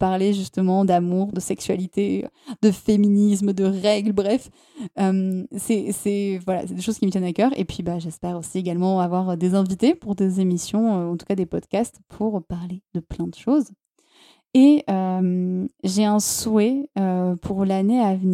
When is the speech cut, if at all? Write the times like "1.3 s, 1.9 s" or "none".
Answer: 1.3 s